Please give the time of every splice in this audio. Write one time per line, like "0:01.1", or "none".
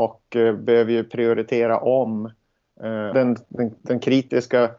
0:03.1